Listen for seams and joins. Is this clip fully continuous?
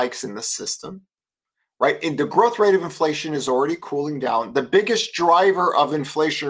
yes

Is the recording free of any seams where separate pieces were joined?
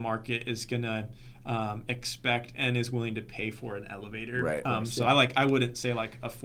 yes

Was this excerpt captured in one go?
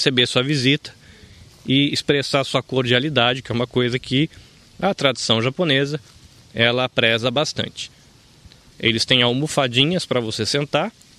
yes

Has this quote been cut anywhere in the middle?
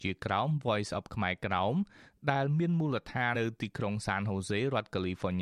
yes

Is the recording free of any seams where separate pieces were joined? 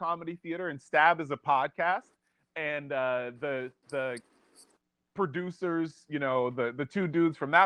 yes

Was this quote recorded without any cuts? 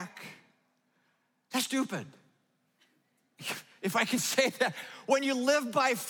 no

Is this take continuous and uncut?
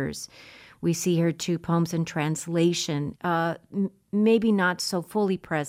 no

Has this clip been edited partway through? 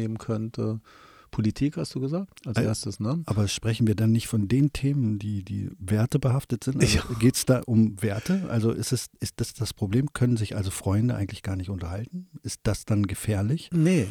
no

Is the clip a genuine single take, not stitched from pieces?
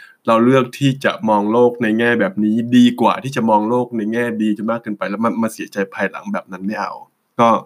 yes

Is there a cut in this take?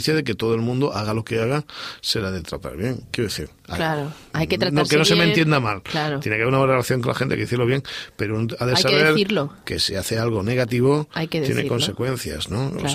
no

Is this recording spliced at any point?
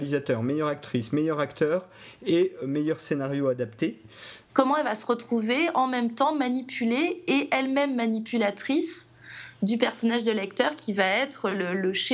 yes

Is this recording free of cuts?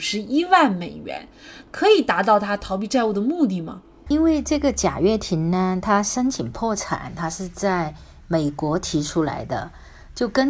yes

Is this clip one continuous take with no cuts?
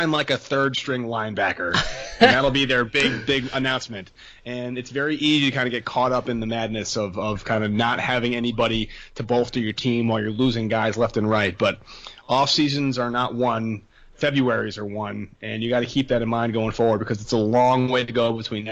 yes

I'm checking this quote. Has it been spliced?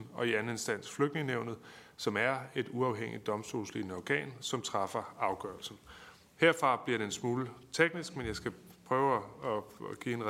no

